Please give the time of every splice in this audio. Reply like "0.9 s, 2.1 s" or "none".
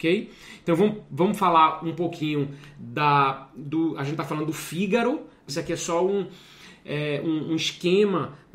5.5 s